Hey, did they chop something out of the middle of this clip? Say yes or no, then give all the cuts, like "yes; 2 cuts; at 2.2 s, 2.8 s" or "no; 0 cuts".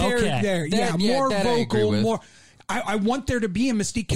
no; 0 cuts